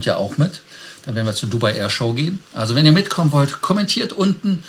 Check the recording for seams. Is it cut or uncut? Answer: uncut